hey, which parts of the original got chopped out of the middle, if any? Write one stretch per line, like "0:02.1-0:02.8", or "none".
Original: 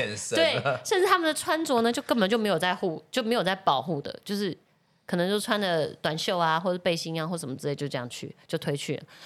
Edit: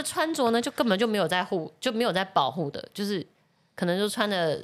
none